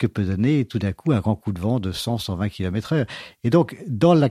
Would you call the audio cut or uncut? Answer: uncut